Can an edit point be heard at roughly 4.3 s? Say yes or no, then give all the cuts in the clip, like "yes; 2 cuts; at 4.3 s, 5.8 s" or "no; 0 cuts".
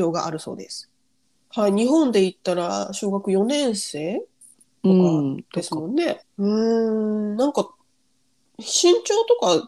no; 2 cuts; at 1.4 s, 6.2 s